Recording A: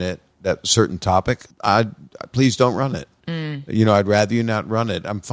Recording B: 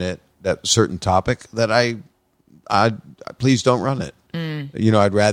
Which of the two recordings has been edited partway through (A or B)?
A